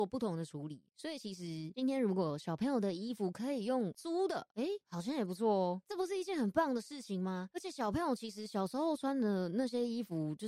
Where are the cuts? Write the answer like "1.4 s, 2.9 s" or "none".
5.8 s